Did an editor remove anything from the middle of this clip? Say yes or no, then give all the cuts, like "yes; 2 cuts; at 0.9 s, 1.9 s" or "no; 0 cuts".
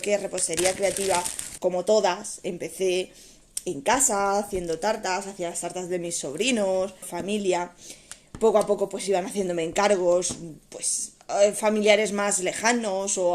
yes; 2 cuts; at 1.6 s, 7.0 s